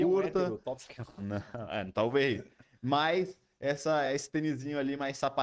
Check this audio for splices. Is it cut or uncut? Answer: uncut